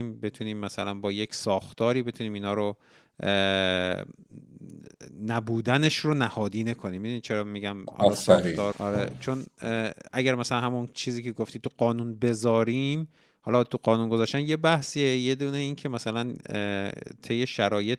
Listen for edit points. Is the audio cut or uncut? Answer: cut